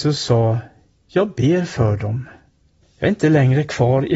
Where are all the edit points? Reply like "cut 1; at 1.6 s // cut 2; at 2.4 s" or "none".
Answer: cut 1; at 2.8 s

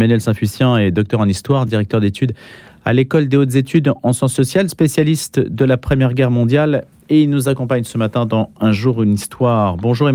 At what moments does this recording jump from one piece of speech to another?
none

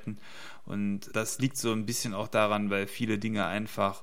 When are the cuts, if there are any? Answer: cut 1; at 1.1 s

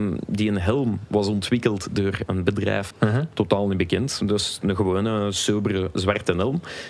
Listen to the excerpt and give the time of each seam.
cut 1; at 2.9 s

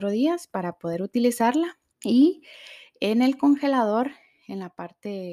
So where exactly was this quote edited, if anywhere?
cut 1; at 1.9 s

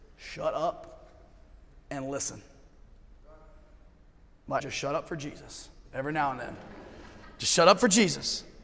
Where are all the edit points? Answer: cut 1; at 4.6 s

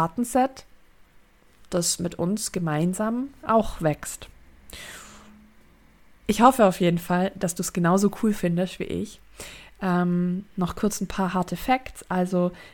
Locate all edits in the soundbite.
cut 1; at 6.2 s

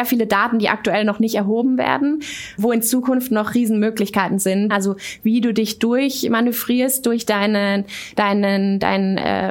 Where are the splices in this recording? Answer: cut 1; at 2.6 s // cut 2; at 4.7 s

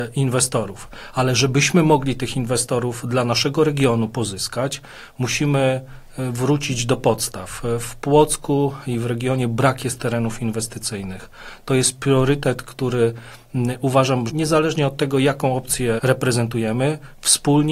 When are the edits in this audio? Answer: cut 1; at 14.3 s // cut 2; at 16.0 s

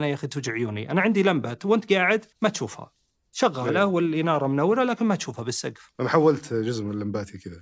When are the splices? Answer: cut 1; at 2.3 s

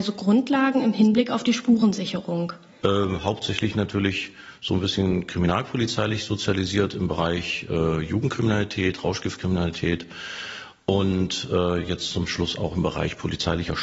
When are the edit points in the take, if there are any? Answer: cut 1; at 2.8 s

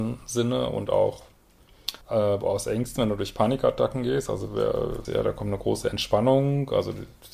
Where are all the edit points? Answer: cut 1; at 2.0 s // cut 2; at 5.0 s

